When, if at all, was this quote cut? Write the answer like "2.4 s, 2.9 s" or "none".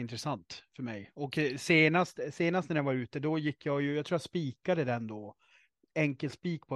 none